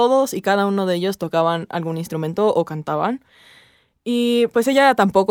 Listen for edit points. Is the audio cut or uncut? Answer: uncut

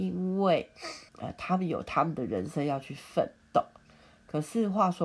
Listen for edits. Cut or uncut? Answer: cut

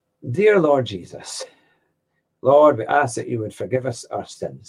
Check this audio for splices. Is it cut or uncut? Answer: uncut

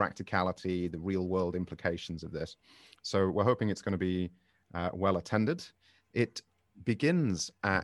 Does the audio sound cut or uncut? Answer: uncut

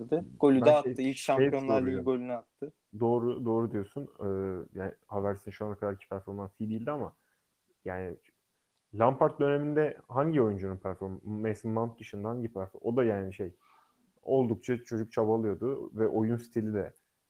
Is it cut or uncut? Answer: uncut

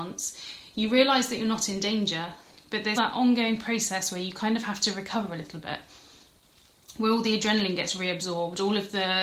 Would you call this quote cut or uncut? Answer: cut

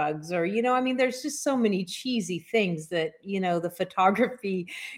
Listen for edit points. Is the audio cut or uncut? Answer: uncut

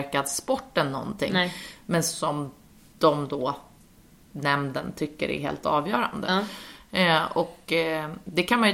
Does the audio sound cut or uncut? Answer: uncut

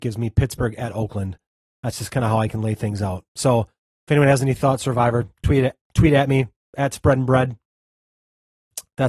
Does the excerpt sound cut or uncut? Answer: uncut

